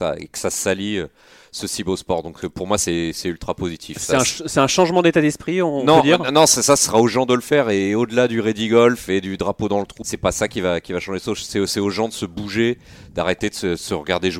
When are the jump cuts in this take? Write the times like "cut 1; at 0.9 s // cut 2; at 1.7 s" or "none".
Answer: cut 1; at 10.0 s